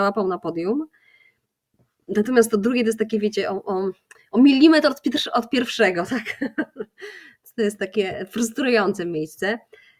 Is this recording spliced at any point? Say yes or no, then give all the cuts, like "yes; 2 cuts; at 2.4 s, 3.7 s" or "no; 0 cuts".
no; 0 cuts